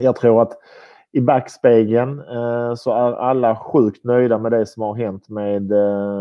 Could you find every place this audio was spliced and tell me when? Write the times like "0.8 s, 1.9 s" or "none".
none